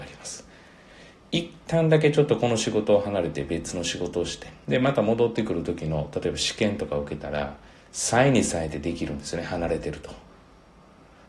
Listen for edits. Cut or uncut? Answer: uncut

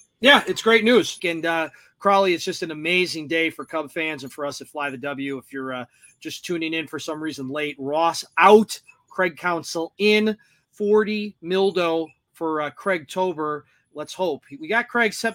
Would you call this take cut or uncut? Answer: cut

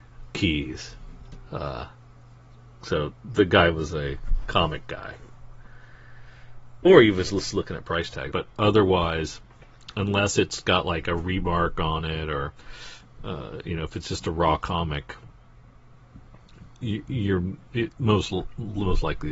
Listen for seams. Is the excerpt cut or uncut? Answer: cut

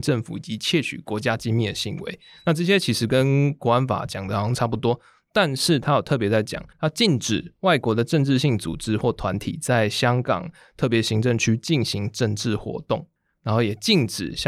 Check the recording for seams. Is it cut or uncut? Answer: cut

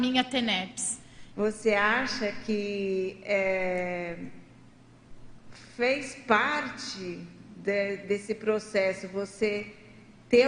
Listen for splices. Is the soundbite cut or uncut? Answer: cut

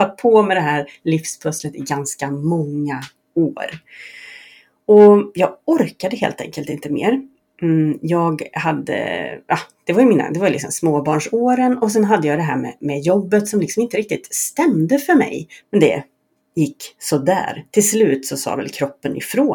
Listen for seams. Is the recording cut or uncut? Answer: cut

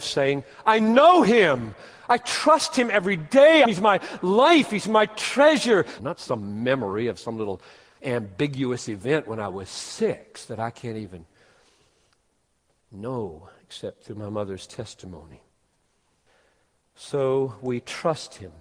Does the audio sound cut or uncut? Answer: cut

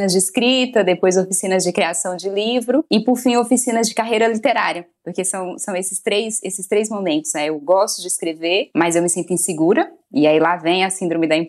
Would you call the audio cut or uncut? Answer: uncut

